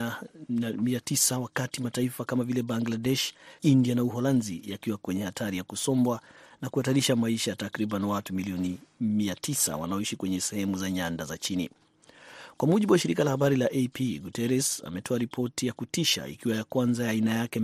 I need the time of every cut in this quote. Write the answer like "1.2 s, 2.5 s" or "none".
3.6 s